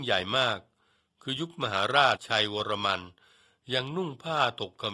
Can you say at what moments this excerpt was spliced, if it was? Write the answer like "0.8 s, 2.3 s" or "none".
2.2 s